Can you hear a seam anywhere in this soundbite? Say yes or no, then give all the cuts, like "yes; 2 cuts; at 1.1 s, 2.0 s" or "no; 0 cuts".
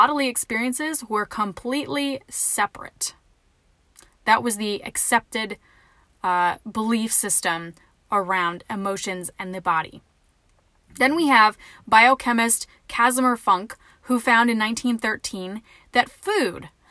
no; 0 cuts